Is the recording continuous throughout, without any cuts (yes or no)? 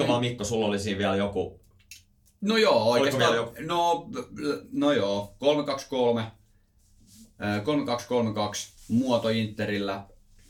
yes